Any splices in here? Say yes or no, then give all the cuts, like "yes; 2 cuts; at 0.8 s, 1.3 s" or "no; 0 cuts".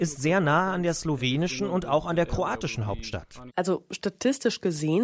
yes; 1 cut; at 3.5 s